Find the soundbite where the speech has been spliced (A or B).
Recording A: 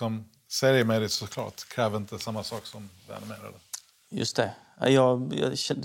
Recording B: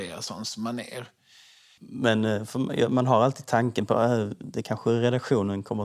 B